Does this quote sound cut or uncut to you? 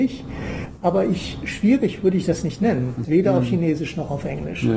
cut